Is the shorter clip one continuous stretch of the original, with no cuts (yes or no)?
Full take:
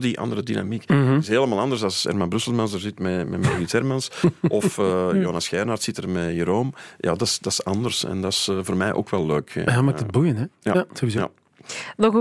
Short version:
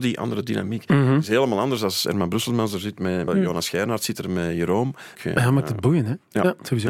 no